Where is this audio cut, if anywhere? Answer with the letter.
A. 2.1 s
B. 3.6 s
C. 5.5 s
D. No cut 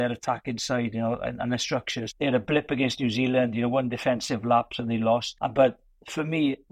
A